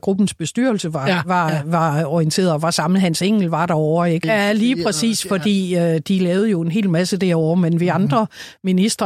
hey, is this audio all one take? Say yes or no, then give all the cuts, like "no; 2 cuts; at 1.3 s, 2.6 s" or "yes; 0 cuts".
no; 1 cut; at 4.2 s